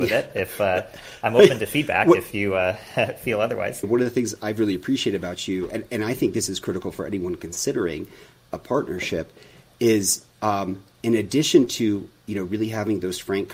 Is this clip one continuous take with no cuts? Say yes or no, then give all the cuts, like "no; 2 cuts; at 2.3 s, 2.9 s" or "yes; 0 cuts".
no; 1 cut; at 3.8 s